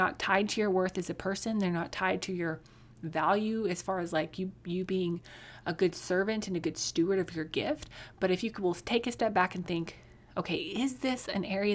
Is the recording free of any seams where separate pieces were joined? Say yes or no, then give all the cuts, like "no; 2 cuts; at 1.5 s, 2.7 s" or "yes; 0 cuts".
yes; 0 cuts